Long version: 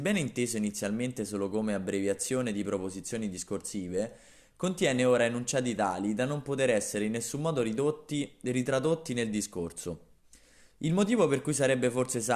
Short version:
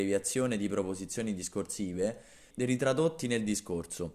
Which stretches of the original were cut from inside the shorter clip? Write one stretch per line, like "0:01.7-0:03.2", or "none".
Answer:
0:04.5-0:08.4

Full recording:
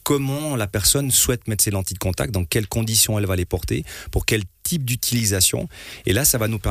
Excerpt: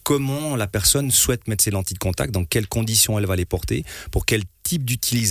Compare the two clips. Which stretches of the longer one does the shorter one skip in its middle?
none

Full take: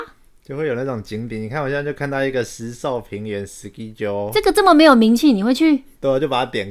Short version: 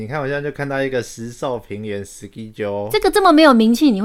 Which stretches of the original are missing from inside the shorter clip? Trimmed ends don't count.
none

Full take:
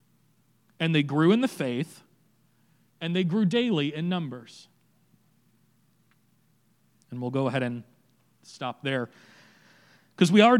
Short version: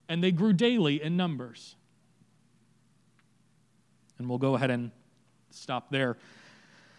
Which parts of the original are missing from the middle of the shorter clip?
none

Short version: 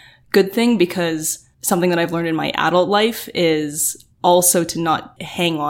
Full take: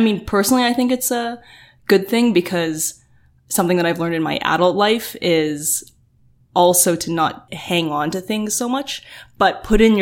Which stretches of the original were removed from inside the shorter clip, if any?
0:03.1-0:03.4
0:06.0-0:06.4

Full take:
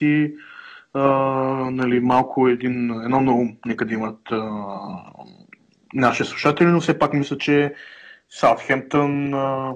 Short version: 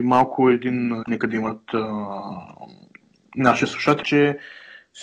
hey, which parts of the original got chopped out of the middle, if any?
0:03.0-0:03.6
0:06.6-0:07.4

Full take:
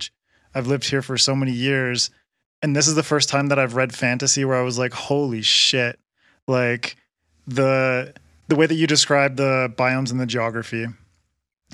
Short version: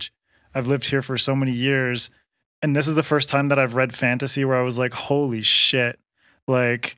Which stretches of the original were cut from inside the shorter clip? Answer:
none

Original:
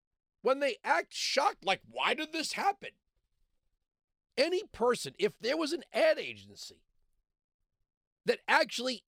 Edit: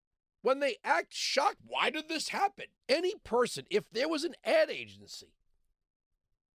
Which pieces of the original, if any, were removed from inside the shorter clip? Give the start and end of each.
0:01.6-0:01.8
0:03.0-0:04.3

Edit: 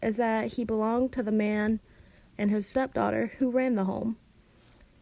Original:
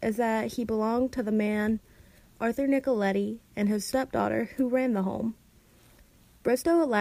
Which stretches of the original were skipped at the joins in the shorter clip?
0:02.3-0:03.5

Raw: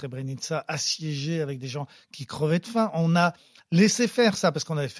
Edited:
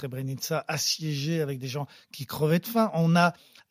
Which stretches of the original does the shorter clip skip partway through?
none

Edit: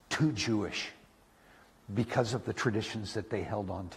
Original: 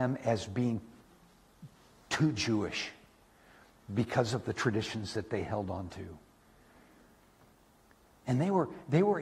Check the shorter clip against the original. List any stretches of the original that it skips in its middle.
none

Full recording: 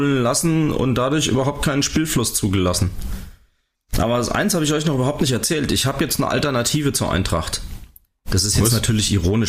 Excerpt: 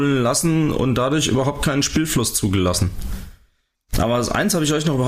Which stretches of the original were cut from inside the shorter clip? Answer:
none

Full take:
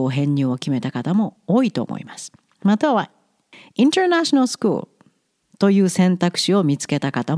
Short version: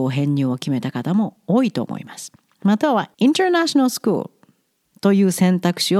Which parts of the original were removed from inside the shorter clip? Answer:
0:03.1-0:03.7

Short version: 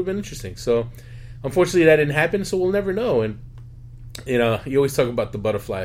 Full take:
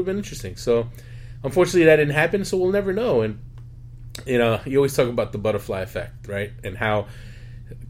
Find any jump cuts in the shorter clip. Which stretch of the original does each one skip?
none

